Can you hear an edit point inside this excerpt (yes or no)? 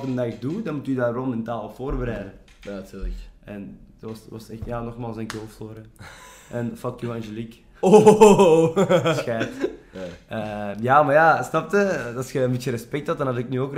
no